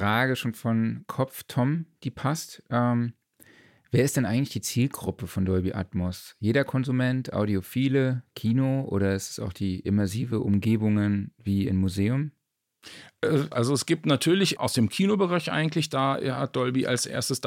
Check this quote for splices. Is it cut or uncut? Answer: cut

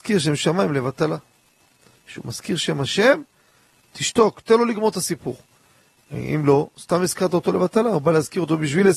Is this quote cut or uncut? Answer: uncut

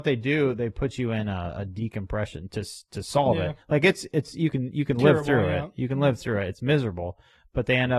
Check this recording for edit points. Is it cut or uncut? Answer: uncut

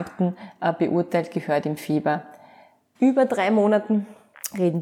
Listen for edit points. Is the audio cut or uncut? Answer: cut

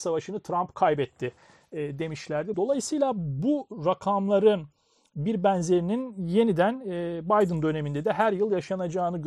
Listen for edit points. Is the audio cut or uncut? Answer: cut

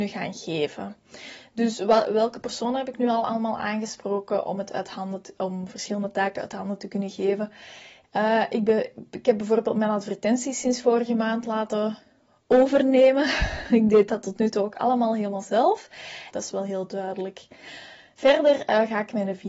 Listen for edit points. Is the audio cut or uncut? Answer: cut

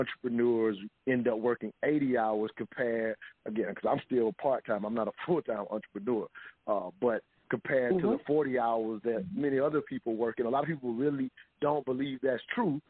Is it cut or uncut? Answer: uncut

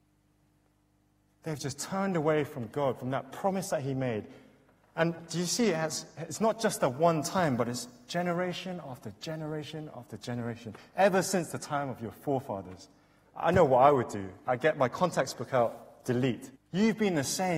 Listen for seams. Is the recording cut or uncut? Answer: cut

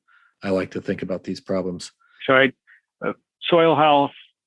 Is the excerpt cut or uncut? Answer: cut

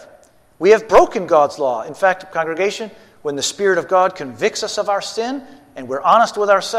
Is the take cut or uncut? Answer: uncut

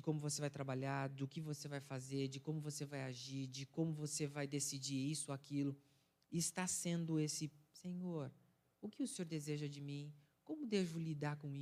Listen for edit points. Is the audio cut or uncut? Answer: uncut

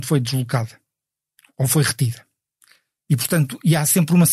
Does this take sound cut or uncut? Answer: uncut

